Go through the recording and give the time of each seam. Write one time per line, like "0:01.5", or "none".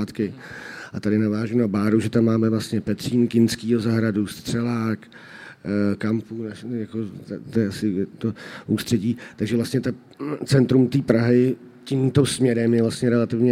none